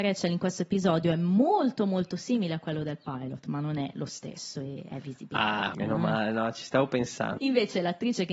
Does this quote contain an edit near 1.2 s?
no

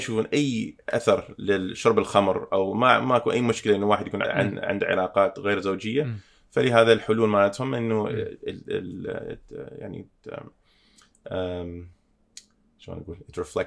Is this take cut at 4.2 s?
yes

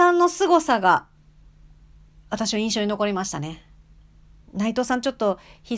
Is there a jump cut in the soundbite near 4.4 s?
no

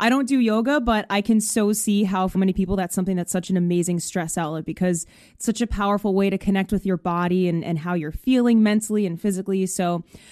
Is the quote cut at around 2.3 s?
yes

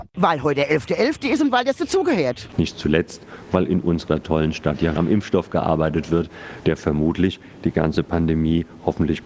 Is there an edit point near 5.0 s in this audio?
yes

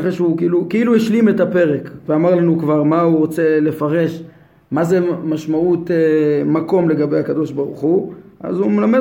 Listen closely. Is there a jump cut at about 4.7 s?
no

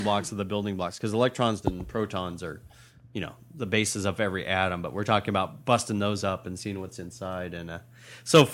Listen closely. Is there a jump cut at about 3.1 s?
no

